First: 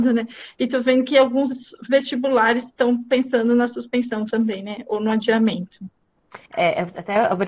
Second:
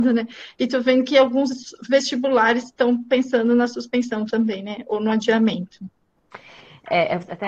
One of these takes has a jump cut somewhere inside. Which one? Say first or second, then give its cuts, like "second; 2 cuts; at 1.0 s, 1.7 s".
first; 1 cut; at 6.5 s